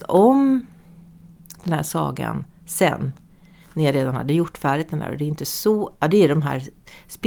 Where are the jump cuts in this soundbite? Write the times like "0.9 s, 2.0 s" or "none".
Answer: none